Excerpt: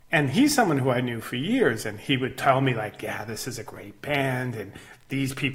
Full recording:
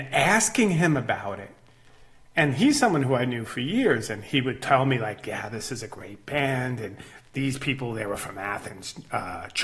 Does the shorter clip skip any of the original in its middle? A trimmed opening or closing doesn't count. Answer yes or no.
no